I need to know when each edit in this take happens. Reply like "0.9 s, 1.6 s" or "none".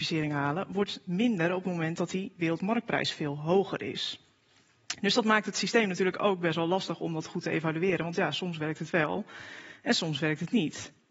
none